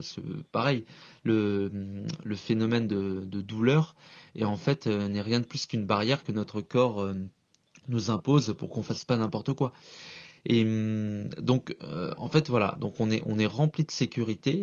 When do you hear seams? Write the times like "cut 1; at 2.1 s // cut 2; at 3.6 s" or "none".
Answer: none